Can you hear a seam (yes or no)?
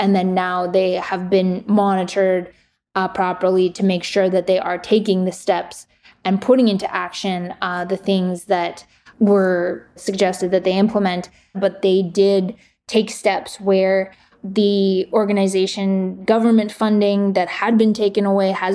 yes